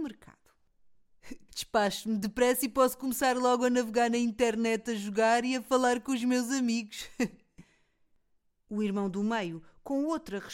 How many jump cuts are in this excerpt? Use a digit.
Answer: 2